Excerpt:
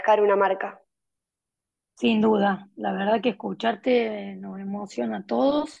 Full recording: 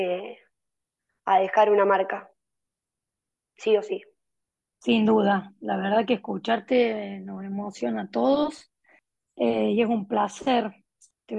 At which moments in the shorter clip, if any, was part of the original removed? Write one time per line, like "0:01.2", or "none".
0:01.8

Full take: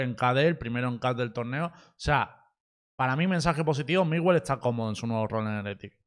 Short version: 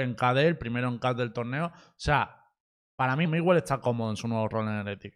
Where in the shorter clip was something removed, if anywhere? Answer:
0:03.3

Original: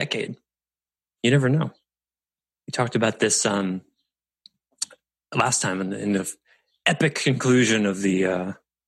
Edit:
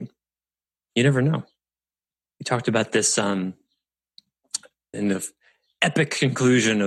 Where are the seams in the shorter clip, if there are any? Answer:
0:04.9

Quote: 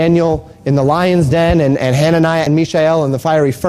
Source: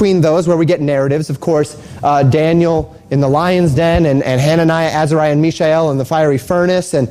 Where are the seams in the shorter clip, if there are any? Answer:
0:02.5

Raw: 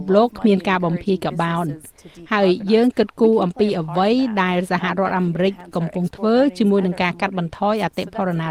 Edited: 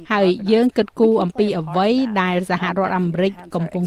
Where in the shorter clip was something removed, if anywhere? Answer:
none

